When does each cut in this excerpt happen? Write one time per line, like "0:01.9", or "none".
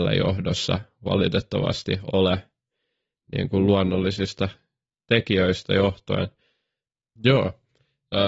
0:07.2